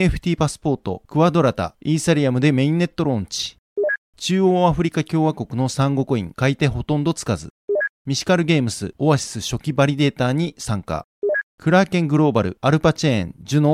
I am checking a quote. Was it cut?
yes; 3 cuts; at 9.0 s, 11.5 s, 12.6 s

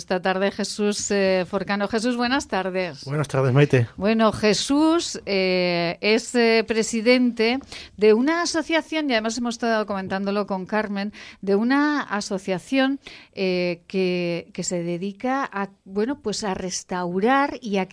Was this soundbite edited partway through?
yes; 1 cut; at 15.8 s

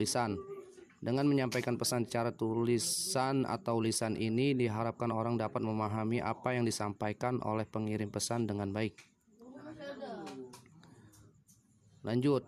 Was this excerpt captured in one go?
yes; 0 cuts

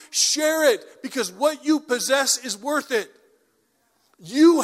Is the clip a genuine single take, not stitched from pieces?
yes; 0 cuts

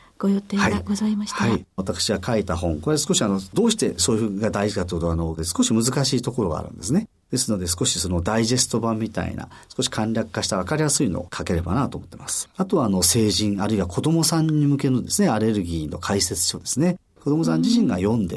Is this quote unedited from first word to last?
no; 1 cut; at 5.4 s

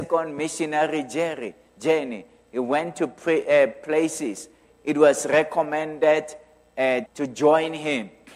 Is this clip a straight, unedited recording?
no; 2 cuts; at 4.6 s, 7.1 s

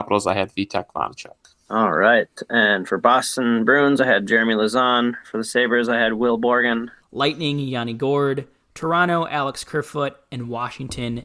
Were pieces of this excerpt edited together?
yes; 2 cuts; at 1.7 s, 7.0 s

